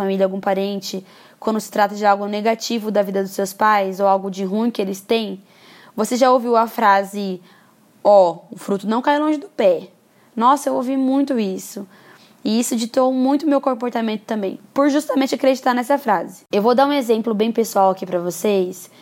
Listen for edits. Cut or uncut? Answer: uncut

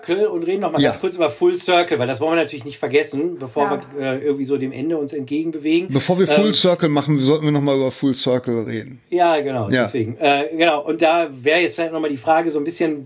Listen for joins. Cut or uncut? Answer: uncut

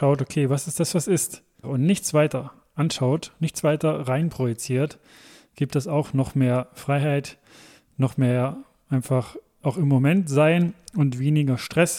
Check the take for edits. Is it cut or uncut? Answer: cut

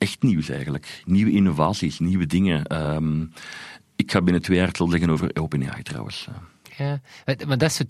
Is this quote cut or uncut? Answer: uncut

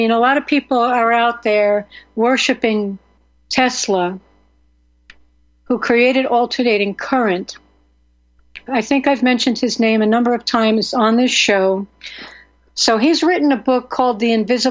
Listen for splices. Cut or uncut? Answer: cut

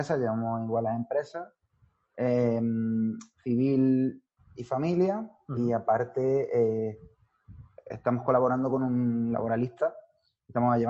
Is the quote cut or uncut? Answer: uncut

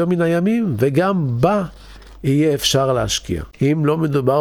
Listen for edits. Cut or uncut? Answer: cut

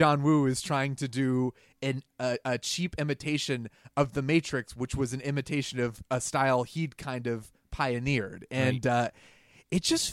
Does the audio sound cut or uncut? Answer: uncut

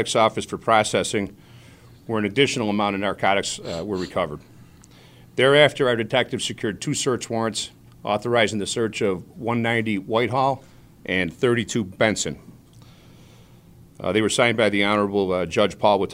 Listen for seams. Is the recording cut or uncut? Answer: uncut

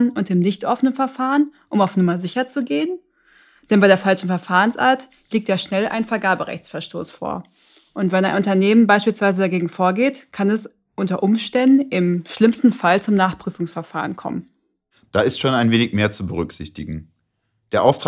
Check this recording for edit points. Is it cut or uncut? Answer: uncut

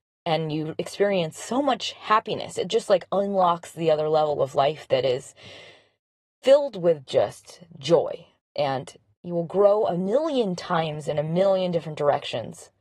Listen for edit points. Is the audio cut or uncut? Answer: uncut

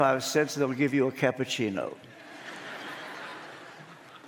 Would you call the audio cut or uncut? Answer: uncut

